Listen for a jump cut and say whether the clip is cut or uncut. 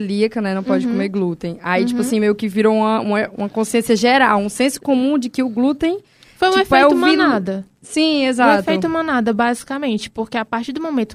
uncut